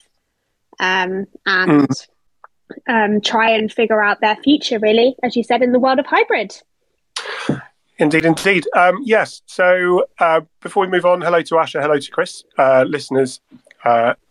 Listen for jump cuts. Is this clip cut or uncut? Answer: uncut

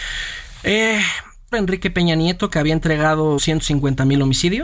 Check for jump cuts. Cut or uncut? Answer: cut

